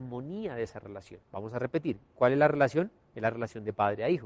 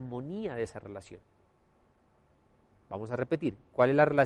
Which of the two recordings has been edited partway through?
first; 1 cut; at 1.3 s

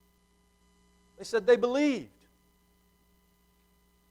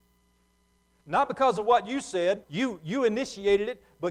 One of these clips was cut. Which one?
second; 2 cuts; at 1.0 s, 2.4 s

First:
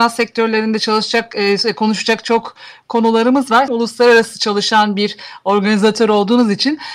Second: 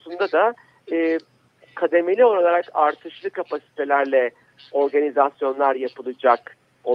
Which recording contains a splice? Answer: first; 1 cut; at 3.7 s

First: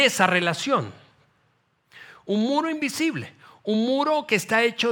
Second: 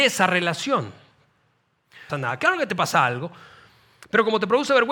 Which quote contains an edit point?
second; 1 cut; at 2.1 s

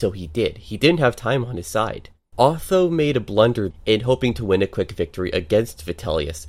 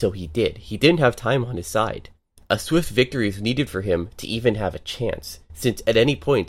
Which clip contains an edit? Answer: first; 2 cuts; at 2.3 s, 3.7 s

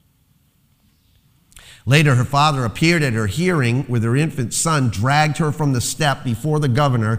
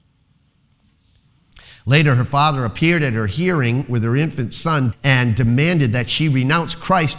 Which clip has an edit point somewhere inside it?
second; 1 cut; at 4.9 s

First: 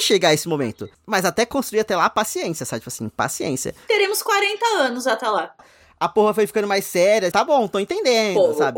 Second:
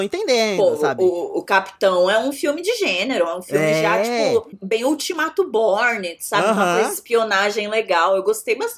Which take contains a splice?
first; 2 cuts; at 5.6 s, 7.3 s

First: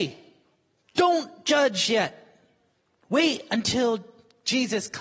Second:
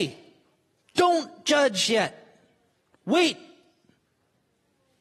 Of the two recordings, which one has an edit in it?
first; 1 cut; at 2.9 s

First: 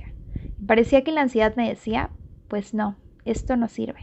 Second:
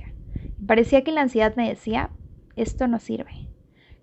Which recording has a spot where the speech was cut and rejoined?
second; 1 cut; at 2.4 s

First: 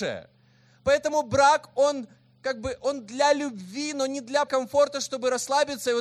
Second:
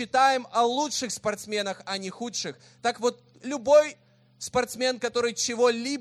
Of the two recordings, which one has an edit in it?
first; 1 cut; at 4.5 s

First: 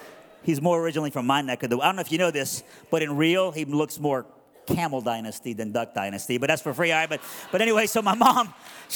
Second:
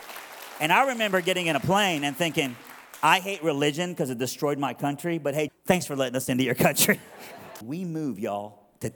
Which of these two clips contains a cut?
second; 2 cuts; at 5.5 s, 7.6 s

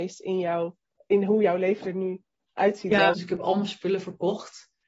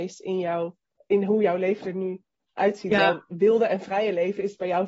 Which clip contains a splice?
first; 1 cut; at 3.1 s

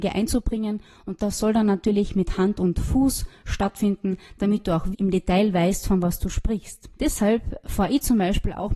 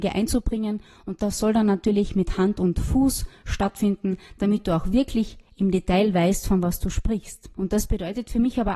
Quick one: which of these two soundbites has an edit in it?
first; 2 cuts; at 4.9 s, 6.9 s

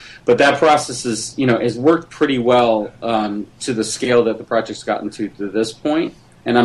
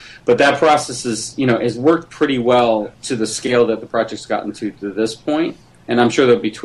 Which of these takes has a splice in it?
second; 1 cut; at 2.9 s

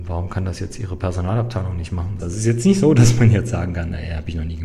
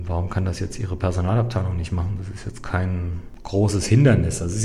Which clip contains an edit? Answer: first; 1 cut; at 2.2 s

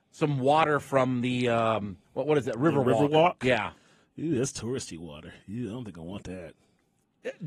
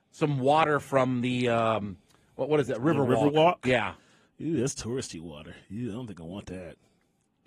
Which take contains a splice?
first; 1 cut; at 2.0 s

